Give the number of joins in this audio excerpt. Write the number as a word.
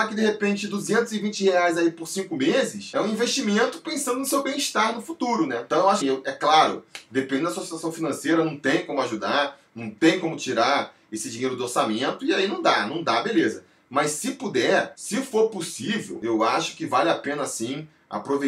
one